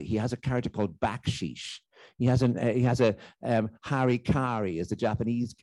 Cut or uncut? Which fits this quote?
uncut